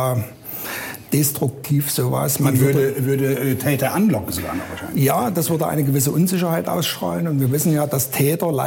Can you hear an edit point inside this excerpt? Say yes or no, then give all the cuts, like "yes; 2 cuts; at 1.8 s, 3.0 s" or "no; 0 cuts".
no; 0 cuts